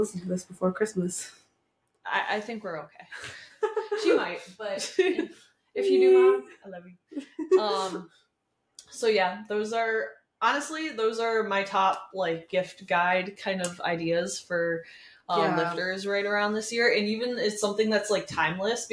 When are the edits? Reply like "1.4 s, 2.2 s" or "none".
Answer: none